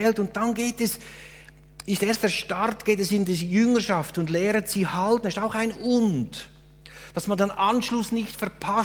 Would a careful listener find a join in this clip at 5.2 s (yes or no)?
no